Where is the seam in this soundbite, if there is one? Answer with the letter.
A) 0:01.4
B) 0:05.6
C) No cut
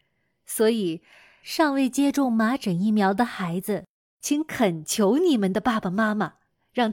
C